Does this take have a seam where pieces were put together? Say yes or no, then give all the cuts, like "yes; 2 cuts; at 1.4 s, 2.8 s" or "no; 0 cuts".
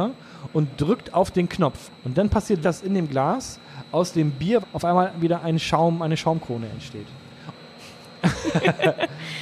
yes; 3 cuts; at 2.6 s, 4.6 s, 7.5 s